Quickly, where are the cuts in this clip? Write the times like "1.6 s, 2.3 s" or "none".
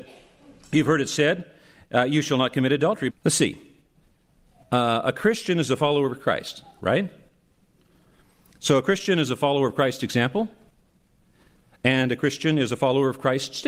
3.1 s

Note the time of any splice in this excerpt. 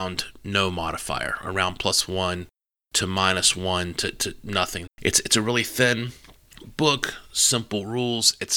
4.9 s

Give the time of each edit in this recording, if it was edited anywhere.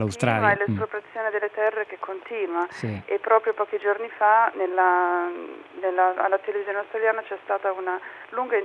none

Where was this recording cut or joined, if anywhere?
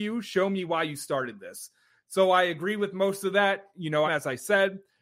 4.1 s

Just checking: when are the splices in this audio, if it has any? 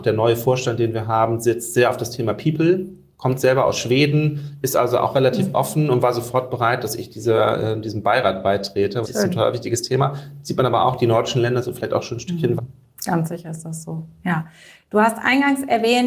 9.0 s, 12.6 s

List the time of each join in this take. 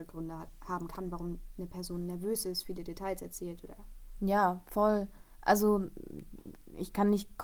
none

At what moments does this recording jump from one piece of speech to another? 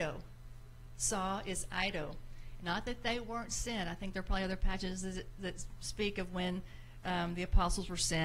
2.6 s, 7.0 s

